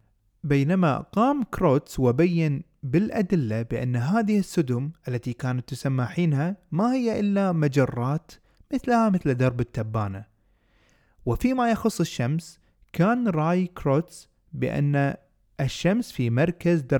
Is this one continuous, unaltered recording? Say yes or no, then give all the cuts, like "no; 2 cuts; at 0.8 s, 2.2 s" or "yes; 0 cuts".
yes; 0 cuts